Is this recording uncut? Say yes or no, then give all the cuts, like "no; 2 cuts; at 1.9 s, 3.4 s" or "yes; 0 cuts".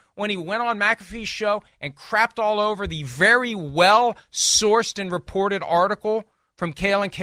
yes; 0 cuts